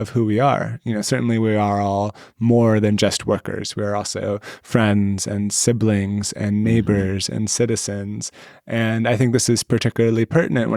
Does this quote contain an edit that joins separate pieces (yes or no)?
no